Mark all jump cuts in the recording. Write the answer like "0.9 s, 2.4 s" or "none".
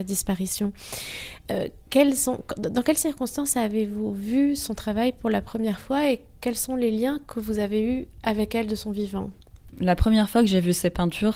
none

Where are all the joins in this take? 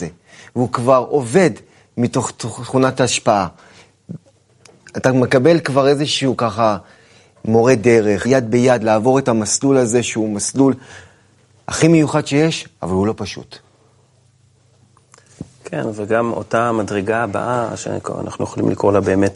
8.2 s

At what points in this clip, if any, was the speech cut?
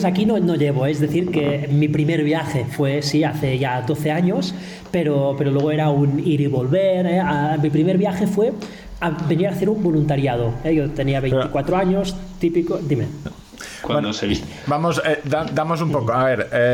13.3 s

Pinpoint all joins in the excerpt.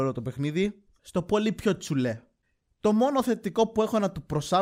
1.0 s

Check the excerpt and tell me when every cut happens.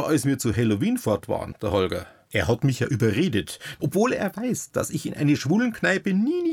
1.5 s, 3.8 s

